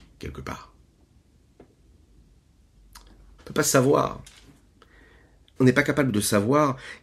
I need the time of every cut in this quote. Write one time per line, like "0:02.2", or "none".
0:03.4
0:05.6